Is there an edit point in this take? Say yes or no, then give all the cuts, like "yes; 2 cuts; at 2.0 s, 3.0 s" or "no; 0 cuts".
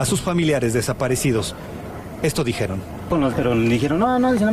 yes; 1 cut; at 3.3 s